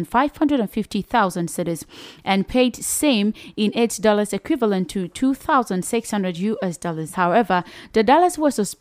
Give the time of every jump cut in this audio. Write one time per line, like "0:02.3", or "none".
none